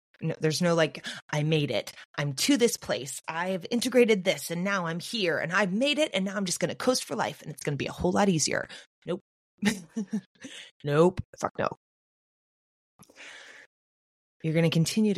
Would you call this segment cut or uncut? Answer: cut